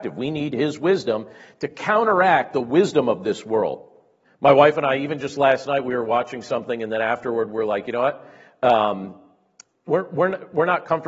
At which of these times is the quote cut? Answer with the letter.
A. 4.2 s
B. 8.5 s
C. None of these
A